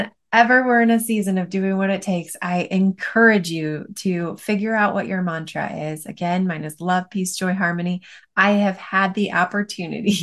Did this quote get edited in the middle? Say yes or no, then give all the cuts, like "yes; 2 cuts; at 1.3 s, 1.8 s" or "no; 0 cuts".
no; 0 cuts